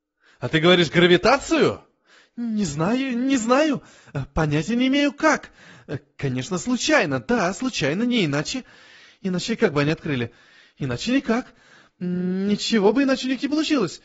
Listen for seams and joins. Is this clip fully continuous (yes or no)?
yes